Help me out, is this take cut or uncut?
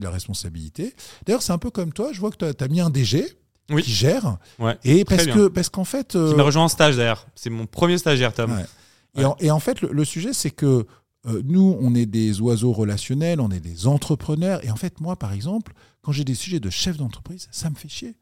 uncut